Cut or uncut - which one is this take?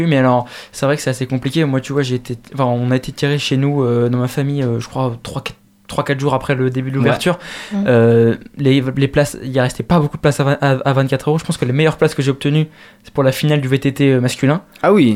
uncut